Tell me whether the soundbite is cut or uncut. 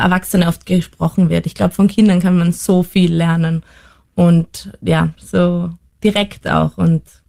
cut